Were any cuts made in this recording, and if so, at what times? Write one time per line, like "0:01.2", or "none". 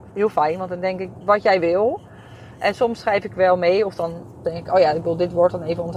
0:01.2